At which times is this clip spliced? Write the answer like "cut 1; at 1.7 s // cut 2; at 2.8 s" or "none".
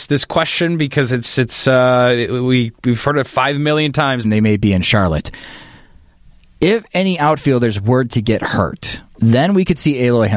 cut 1; at 4.2 s // cut 2; at 9.1 s

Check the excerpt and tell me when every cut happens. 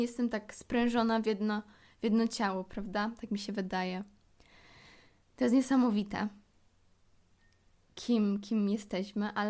none

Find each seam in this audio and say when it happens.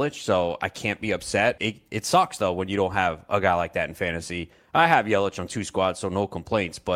cut 1; at 1.6 s

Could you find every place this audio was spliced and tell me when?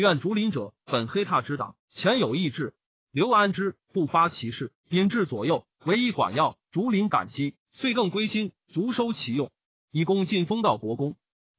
cut 1; at 3.5 s

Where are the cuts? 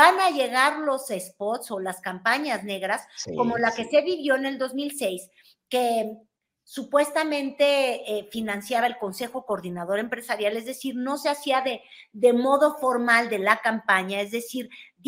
none

